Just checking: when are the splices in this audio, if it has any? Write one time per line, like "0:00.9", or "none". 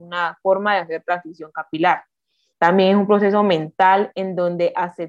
0:02.5